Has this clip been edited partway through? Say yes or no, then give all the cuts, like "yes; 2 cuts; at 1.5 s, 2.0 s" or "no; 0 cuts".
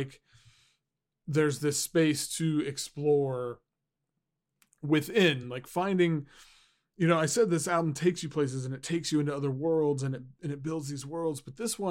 no; 0 cuts